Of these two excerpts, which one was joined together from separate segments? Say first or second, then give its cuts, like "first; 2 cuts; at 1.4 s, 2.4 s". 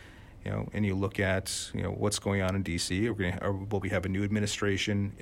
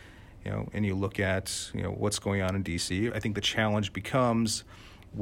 second; 1 cut; at 3.1 s